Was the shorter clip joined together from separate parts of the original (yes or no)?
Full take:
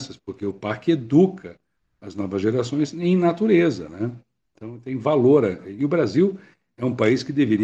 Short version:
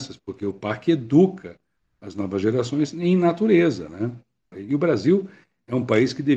yes